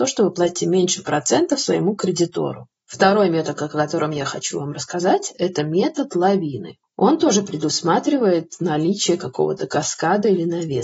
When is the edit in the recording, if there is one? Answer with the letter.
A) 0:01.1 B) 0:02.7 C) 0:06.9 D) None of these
B